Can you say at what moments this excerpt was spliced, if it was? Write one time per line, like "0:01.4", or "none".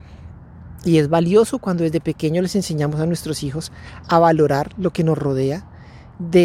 none